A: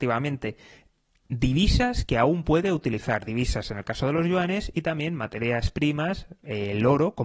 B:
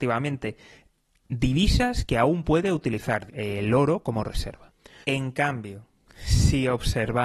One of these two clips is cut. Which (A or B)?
B